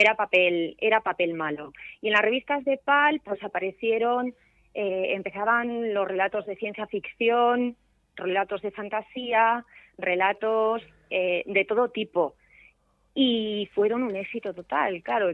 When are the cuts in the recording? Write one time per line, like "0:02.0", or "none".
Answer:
none